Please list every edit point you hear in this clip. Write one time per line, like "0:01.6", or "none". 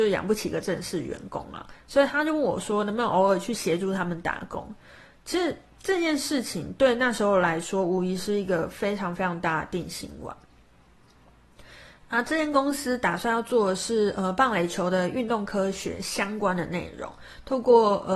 none